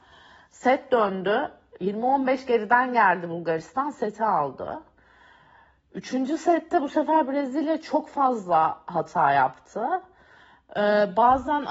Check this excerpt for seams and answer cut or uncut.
uncut